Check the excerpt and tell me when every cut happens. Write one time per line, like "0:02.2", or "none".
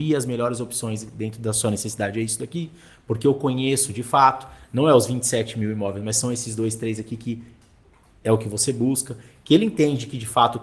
none